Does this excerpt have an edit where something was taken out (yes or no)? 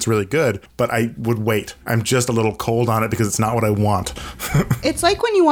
yes